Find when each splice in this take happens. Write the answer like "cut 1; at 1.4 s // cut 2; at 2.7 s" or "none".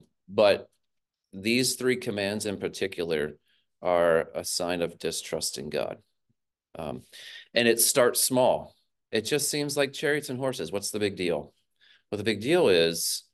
none